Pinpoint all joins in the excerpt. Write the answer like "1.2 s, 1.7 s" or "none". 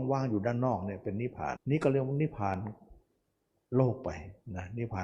1.6 s